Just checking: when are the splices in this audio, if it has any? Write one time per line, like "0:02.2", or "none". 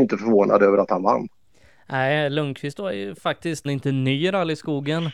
0:03.7